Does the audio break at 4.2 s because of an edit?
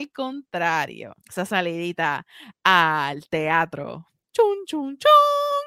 no; 1 cut; at 1.2 s

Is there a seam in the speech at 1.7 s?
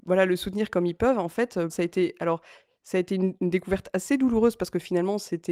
yes; 1 cut; at 1.7 s

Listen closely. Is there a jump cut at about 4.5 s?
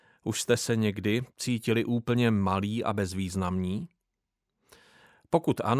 no; 1 cut; at 1.3 s

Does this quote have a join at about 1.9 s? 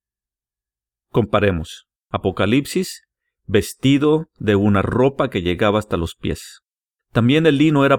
yes; 2 cuts; at 1.9 s, 7.0 s

